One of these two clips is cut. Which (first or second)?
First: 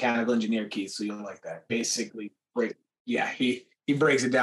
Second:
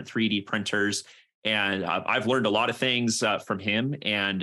first